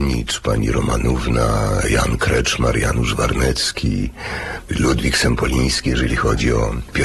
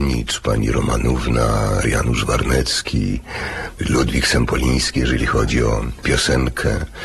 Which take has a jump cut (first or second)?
second